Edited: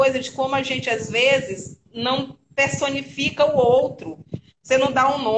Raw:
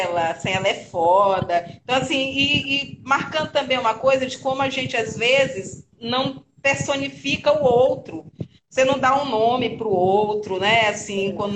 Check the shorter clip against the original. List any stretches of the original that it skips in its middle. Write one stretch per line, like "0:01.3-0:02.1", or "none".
none